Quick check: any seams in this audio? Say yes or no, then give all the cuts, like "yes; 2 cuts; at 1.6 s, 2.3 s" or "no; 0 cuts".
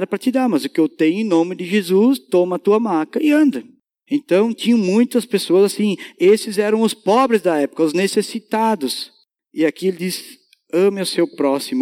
no; 0 cuts